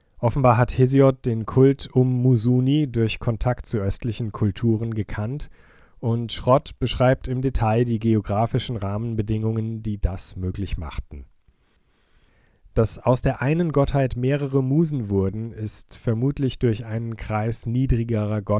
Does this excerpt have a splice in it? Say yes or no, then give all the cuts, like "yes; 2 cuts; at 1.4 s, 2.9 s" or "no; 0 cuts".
no; 0 cuts